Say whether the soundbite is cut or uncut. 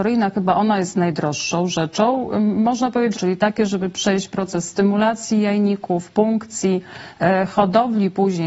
cut